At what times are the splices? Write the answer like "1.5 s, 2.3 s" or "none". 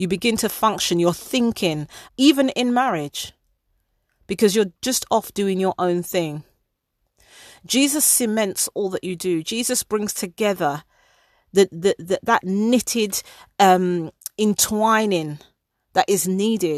2.1 s

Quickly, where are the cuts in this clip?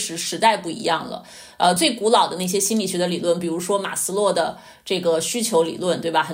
none

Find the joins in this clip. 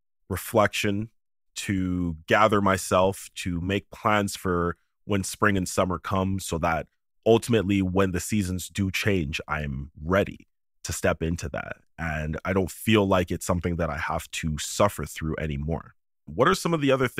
16.3 s

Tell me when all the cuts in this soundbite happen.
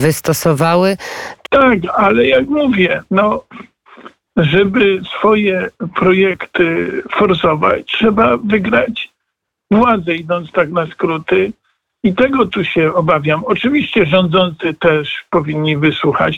1.4 s

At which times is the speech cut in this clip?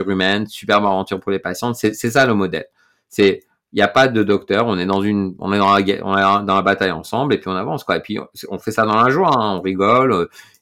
none

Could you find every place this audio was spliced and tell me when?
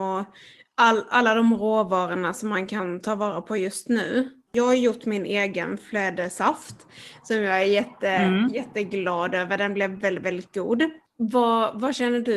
4.5 s

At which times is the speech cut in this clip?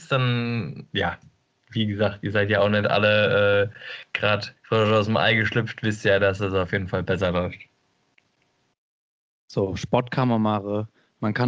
4.6 s

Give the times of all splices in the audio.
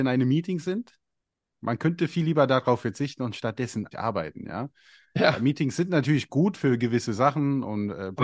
1.5 s, 3.9 s

